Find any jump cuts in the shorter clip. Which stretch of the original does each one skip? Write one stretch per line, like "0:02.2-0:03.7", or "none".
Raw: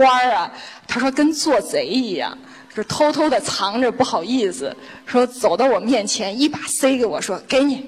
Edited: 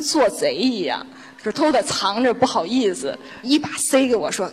0:02.9-0:03.1
0:05.0-0:06.3